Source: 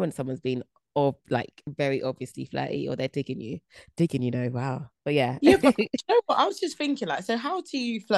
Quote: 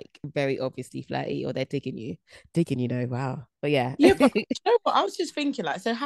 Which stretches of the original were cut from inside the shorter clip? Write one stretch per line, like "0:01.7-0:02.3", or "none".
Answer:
none